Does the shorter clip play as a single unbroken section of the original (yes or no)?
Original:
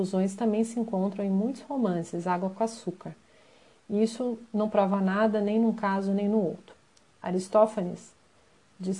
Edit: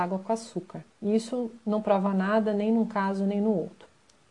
no